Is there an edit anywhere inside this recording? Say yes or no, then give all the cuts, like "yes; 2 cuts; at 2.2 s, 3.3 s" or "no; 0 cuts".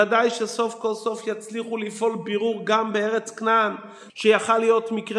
yes; 1 cut; at 4.1 s